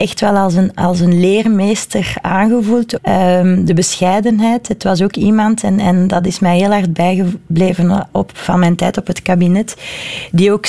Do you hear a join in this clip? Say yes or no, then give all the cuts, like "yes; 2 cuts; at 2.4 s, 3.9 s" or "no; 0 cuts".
yes; 1 cut; at 3.0 s